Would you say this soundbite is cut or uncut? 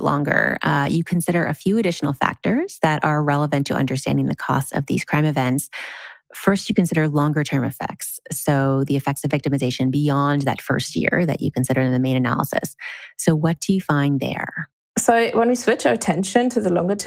uncut